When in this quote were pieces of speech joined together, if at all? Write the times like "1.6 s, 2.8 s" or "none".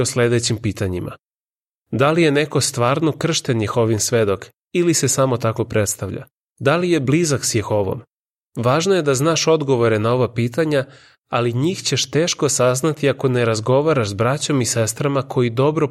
6.5 s, 8.5 s